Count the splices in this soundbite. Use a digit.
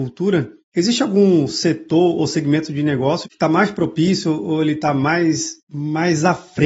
1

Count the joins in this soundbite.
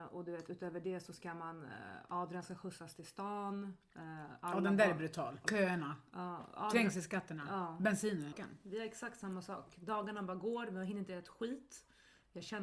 2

